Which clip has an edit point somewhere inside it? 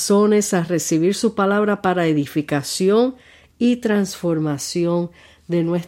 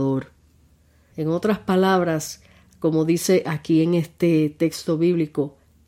second; 1 cut; at 1.1 s

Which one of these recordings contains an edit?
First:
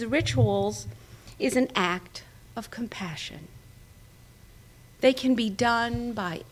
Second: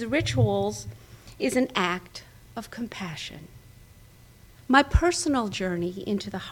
second; 1 cut; at 4.5 s

